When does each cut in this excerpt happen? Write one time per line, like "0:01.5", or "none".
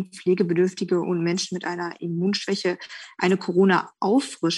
none